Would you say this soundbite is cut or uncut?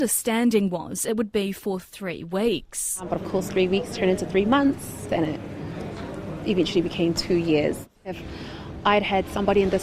cut